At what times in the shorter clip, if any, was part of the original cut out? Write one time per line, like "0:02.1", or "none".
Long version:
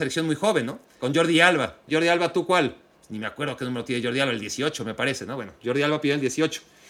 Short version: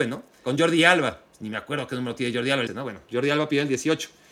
0:01.3
0:02.7